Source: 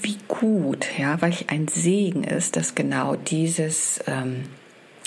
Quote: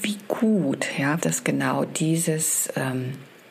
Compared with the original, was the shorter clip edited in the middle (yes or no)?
yes